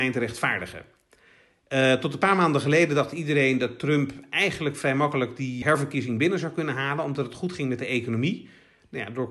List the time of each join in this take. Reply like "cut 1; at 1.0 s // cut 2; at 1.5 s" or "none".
cut 1; at 5.6 s

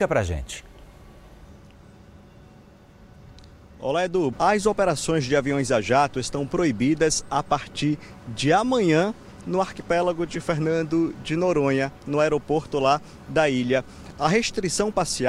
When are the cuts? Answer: cut 1; at 4.3 s

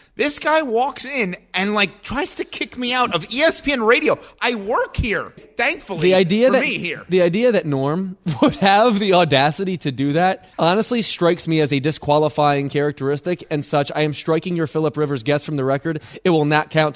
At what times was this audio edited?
cut 1; at 5.4 s // cut 2; at 10.5 s

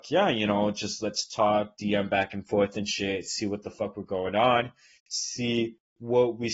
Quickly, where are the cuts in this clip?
none

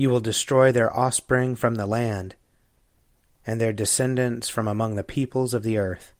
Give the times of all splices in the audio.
none

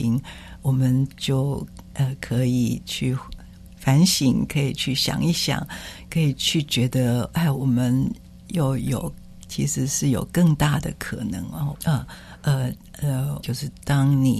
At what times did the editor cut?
cut 1; at 11.7 s // cut 2; at 13.4 s

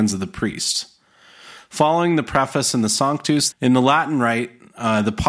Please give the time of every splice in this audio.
cut 1; at 1.6 s // cut 2; at 3.5 s

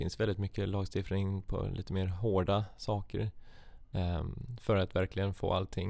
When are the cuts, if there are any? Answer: cut 1; at 3.9 s

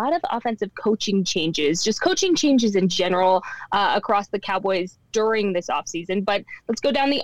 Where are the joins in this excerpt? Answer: none

